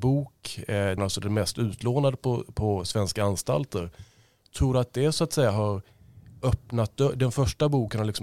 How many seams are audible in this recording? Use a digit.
1